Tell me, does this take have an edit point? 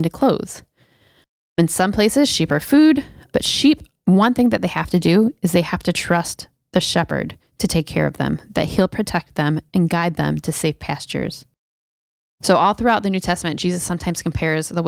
no; 0 cuts

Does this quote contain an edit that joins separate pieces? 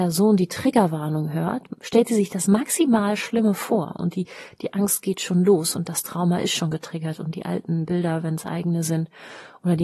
no; 0 cuts

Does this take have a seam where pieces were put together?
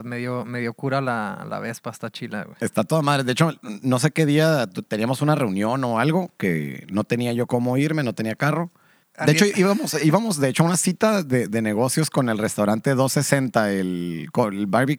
yes; 1 cut; at 9.0 s

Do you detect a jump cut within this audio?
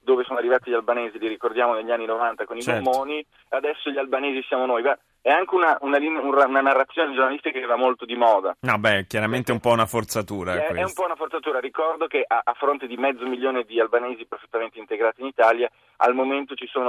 no; 0 cuts

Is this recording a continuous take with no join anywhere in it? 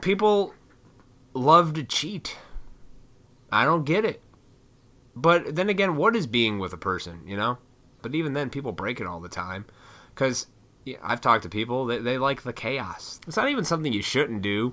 no; 2 cuts; at 8.0 s, 13.2 s

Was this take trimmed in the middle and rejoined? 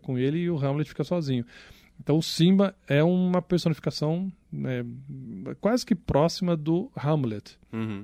no; 0 cuts

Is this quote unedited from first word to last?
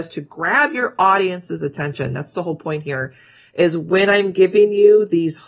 yes; 0 cuts

